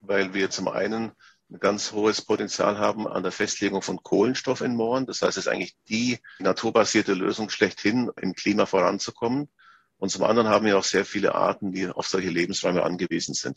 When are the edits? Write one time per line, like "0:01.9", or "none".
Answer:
0:08.2